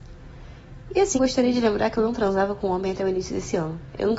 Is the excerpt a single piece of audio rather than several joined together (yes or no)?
no